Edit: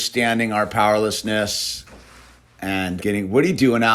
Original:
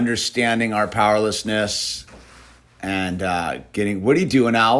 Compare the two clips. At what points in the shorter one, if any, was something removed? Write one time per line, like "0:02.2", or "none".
0:03.0